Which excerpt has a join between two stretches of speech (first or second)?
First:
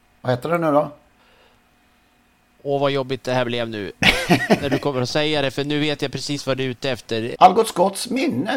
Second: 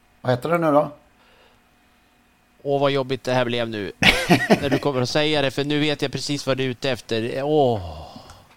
first